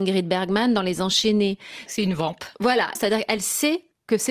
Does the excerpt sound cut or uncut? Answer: cut